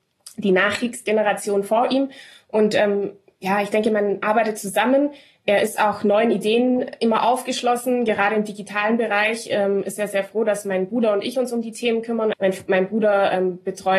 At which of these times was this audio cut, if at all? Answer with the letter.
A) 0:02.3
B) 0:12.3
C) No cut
B